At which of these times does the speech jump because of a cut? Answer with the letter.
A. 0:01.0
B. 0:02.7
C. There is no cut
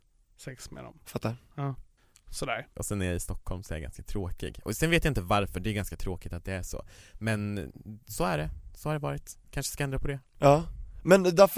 B